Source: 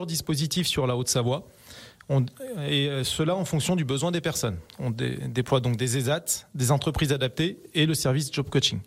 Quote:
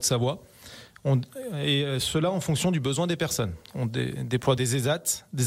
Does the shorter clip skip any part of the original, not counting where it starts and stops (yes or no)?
yes